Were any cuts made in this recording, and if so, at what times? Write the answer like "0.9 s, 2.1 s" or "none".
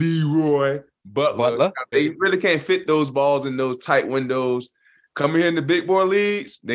1.9 s